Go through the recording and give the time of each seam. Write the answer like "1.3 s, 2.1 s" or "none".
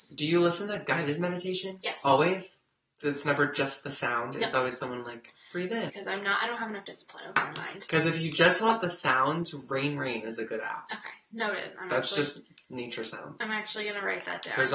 5.9 s